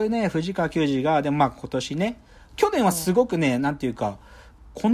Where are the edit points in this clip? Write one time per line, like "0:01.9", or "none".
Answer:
none